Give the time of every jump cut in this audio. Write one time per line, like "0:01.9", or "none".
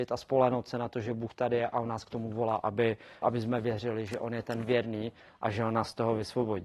0:03.2